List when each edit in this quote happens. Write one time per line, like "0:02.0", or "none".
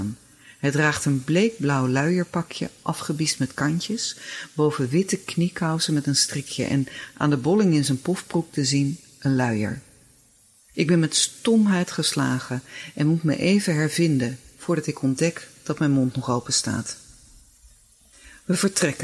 0:10.7